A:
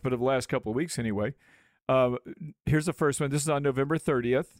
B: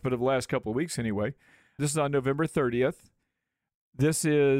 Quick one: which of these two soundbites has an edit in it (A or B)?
B